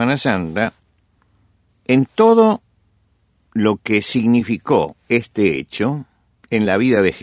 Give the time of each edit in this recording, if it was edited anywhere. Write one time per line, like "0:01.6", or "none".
none

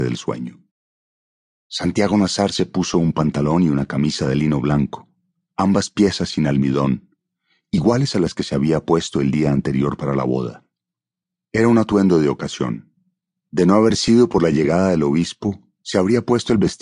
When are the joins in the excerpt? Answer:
0:01.5

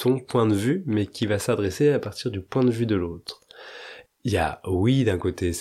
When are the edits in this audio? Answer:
0:04.1

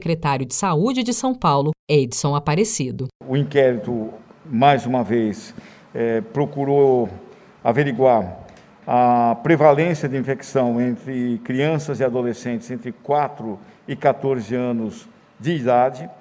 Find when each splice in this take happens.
none

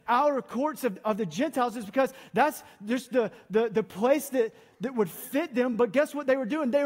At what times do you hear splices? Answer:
none

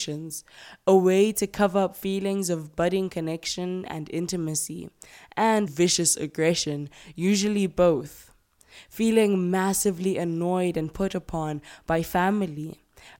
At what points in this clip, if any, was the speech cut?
0:05.7

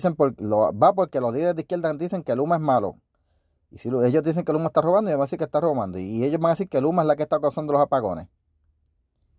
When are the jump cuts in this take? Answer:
none

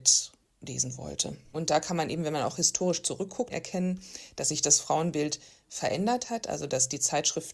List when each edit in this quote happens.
0:01.5
0:03.5

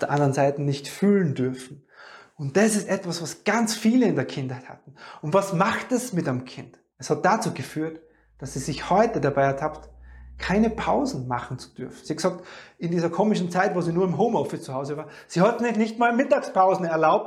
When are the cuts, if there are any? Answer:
0:06.9

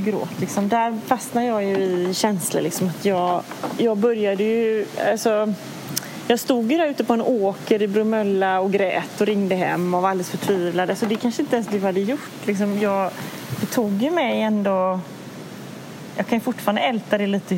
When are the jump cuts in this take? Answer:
none

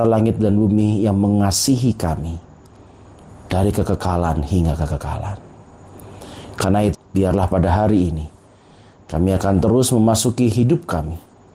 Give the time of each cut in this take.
0:06.9

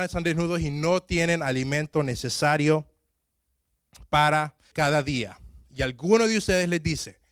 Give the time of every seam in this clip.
0:04.7

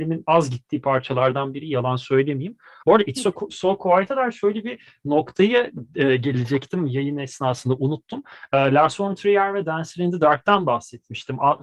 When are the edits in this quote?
0:02.8

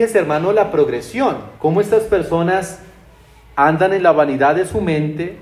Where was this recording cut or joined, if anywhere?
0:01.6

